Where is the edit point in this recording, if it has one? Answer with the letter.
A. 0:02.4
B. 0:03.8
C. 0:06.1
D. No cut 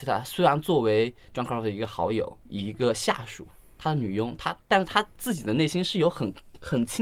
A